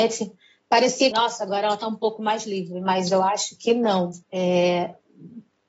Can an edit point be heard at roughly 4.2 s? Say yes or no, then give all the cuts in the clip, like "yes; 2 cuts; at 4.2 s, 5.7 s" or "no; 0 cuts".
yes; 2 cuts; at 1.1 s, 4.2 s